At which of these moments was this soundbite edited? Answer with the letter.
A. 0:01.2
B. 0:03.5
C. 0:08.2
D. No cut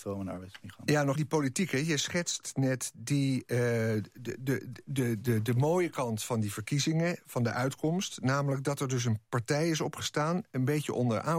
A